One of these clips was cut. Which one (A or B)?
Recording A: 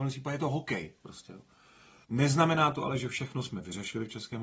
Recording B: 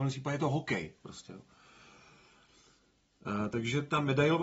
A